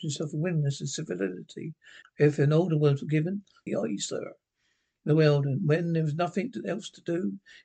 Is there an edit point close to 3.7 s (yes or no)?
yes